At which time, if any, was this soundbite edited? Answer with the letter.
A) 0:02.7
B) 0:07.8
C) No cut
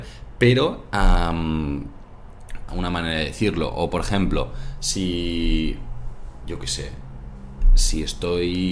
A